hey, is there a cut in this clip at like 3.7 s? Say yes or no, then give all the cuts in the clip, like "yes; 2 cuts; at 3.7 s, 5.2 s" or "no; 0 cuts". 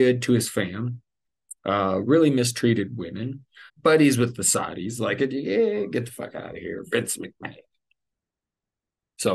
yes; 1 cut; at 3.7 s